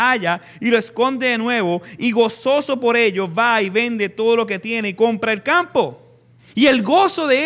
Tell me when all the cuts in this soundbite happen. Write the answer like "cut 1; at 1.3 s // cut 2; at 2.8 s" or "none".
cut 1; at 6.4 s